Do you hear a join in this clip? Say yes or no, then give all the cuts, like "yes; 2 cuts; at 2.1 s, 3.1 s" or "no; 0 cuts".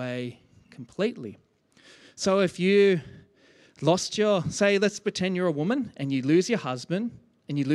no; 0 cuts